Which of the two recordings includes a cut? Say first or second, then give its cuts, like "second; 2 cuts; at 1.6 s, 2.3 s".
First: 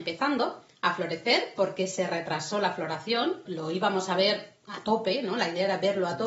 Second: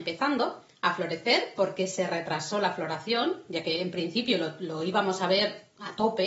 first; 1 cut; at 3.5 s